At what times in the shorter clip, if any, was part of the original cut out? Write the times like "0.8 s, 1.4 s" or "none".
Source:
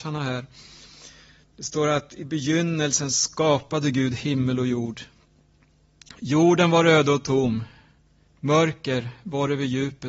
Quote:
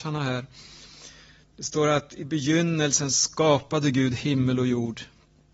none

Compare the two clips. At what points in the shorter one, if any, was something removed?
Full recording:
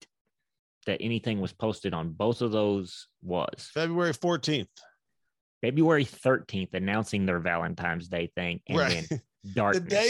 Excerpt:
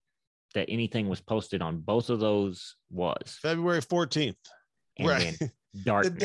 4.9 s

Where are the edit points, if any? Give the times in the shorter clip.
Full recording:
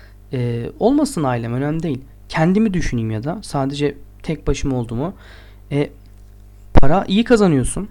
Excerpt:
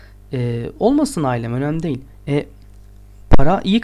2.1 s

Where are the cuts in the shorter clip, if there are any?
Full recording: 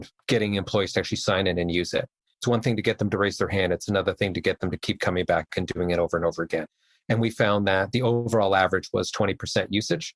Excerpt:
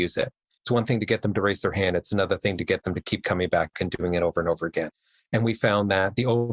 none

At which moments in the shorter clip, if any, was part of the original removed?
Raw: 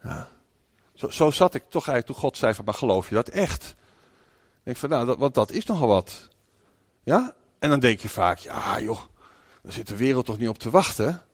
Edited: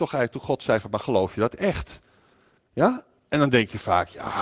2.6 s

